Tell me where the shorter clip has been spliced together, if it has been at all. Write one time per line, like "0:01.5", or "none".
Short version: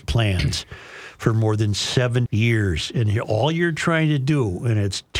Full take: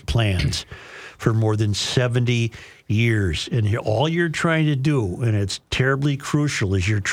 0:02.3